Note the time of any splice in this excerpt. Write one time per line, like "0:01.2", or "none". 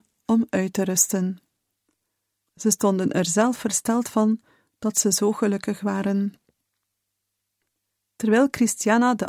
0:02.5